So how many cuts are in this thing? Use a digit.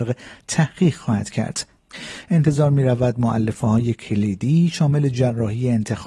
1